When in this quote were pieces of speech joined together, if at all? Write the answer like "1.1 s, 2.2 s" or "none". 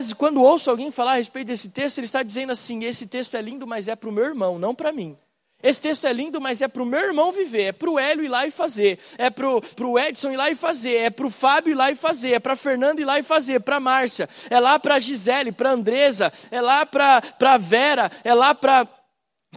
9.7 s